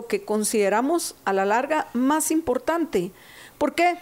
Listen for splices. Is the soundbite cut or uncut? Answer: uncut